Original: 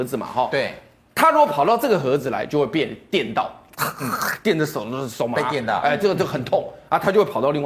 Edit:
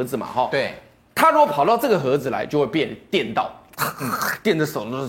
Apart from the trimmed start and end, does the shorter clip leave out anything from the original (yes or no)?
no